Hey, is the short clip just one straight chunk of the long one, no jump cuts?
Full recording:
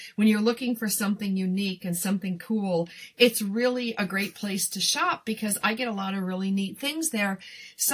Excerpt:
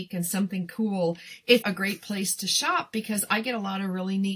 no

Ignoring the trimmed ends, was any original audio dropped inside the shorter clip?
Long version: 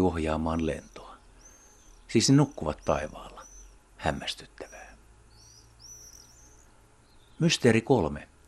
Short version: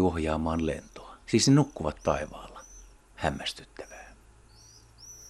yes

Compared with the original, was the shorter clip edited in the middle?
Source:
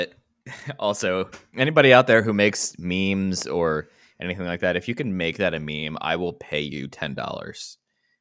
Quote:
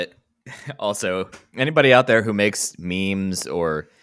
no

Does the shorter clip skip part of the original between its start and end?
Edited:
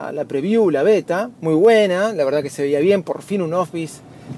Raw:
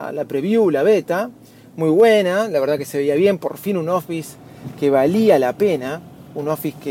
yes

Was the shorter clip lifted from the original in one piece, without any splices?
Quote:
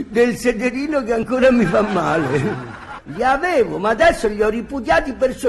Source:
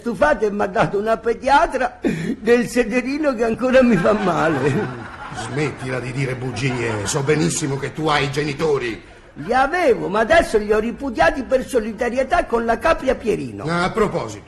no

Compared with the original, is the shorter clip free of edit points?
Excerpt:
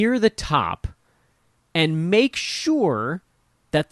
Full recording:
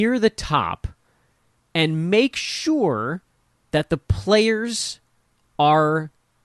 yes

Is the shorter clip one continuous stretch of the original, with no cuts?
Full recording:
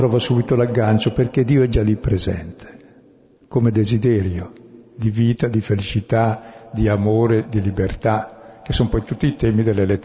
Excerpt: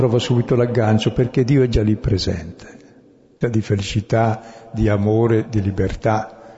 no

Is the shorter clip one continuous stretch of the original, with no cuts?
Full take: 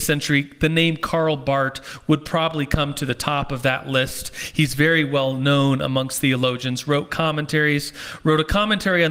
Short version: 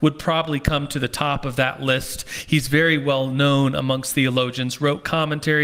yes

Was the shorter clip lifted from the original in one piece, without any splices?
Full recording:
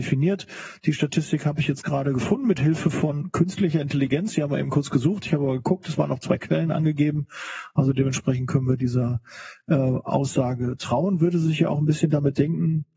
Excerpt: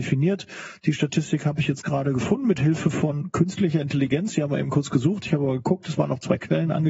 yes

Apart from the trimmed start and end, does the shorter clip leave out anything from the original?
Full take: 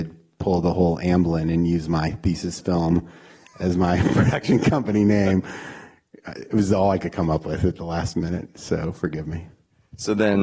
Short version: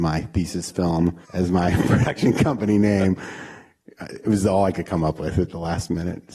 yes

